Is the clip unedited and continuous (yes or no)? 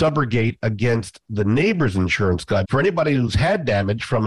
no